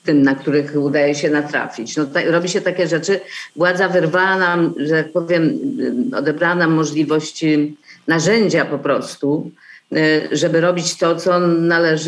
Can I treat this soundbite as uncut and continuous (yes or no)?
yes